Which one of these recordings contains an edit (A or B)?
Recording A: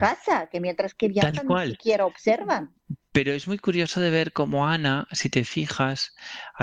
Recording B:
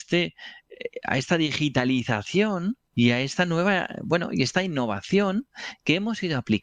B